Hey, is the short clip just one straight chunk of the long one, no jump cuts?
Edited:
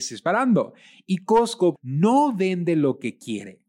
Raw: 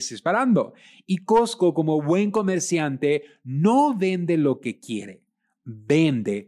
no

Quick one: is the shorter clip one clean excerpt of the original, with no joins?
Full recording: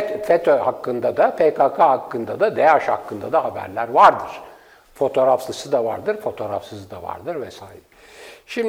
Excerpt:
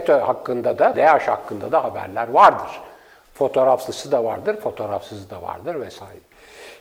no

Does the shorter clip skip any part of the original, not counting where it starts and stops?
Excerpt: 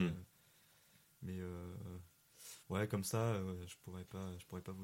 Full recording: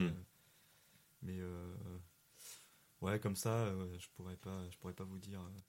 yes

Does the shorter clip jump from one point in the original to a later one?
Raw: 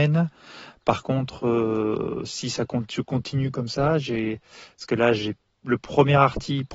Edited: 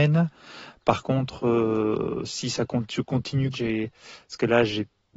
yes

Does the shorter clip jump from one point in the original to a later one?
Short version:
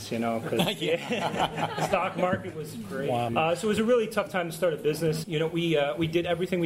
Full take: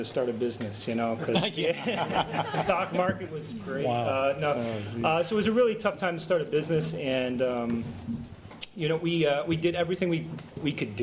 yes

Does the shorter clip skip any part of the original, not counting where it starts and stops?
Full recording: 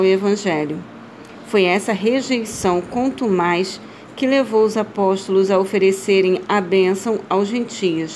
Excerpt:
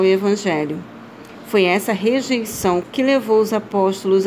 yes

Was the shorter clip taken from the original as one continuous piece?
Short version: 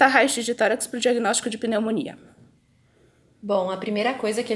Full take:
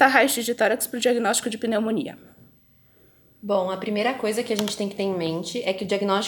yes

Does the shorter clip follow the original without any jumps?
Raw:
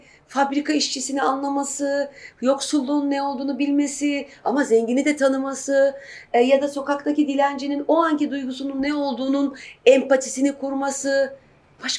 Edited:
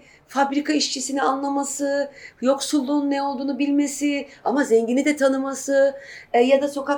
yes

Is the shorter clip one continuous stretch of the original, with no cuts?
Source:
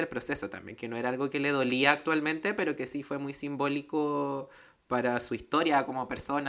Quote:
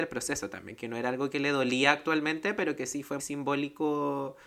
no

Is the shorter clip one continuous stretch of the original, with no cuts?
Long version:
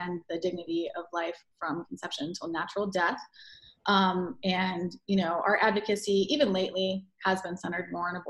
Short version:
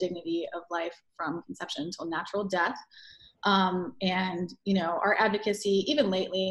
yes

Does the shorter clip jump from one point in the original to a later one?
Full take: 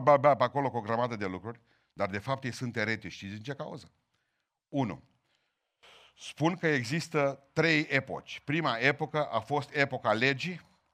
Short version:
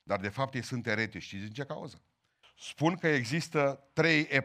yes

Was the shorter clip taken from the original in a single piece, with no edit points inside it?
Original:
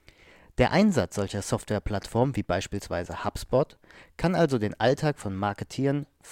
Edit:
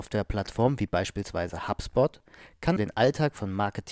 no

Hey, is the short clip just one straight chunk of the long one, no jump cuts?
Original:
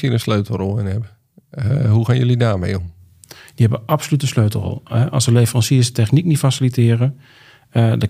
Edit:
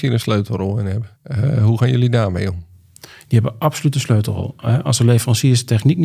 no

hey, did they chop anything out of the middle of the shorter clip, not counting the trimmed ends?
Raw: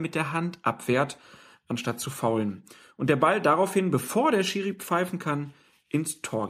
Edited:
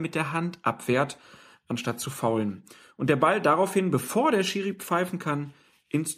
no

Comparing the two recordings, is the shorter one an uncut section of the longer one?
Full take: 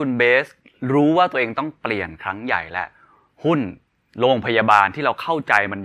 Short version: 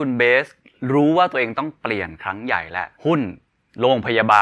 no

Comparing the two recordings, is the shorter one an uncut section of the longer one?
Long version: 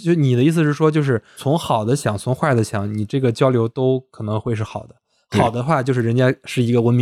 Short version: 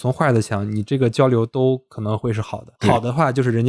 no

